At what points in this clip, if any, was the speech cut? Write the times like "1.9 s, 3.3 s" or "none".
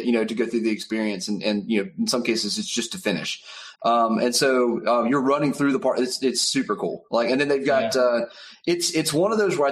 3.7 s